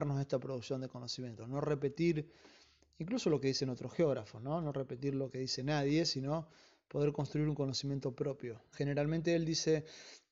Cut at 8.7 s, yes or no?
yes